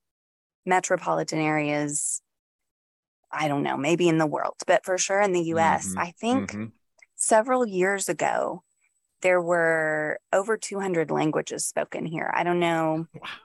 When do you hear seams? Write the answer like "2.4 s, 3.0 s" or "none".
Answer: 9.2 s